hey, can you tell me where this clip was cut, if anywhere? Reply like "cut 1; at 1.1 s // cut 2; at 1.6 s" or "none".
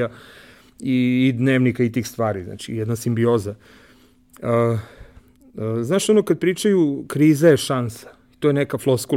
none